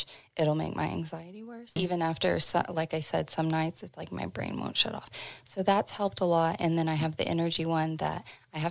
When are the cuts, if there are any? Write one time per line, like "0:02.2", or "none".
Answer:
0:01.8